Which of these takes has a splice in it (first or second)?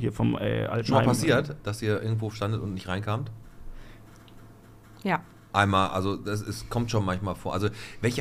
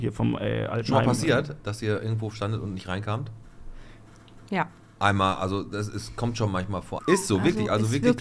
second